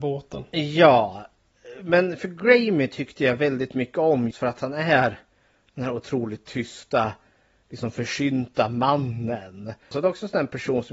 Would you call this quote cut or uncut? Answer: cut